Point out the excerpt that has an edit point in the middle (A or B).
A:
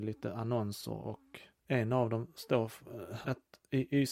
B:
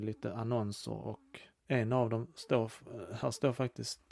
A